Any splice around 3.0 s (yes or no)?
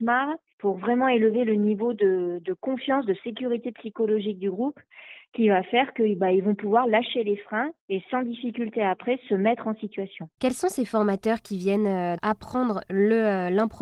no